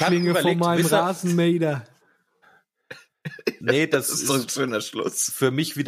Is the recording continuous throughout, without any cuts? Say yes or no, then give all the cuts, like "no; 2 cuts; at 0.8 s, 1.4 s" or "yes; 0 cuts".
no; 1 cut; at 2.4 s